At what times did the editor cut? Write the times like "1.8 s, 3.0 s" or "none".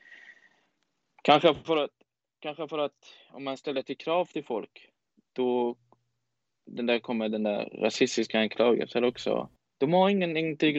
9.6 s

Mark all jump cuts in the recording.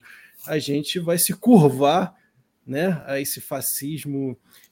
none

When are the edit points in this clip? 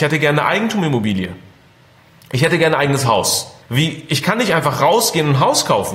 3.6 s

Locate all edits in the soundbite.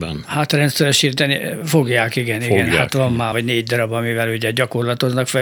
3.3 s

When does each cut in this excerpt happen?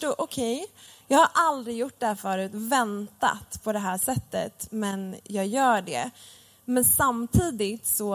none

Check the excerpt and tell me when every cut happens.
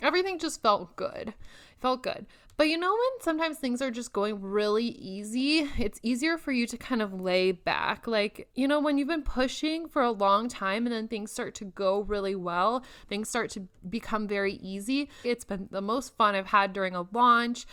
8.5 s, 15.2 s

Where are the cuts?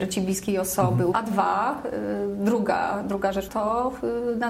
1.1 s, 3.5 s

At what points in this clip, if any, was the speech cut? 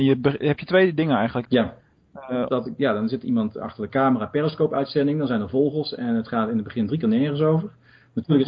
1.4 s, 2.5 s

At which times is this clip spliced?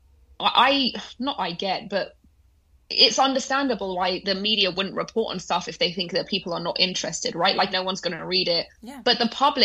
7.7 s

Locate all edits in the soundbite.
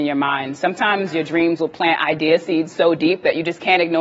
none

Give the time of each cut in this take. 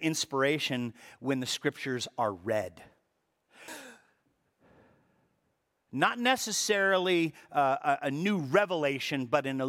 3.7 s

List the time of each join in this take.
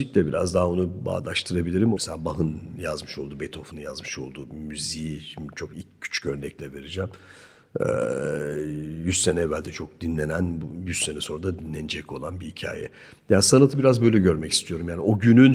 2.0 s

